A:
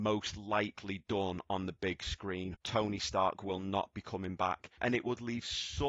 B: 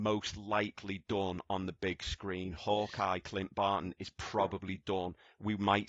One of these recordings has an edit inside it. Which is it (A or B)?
A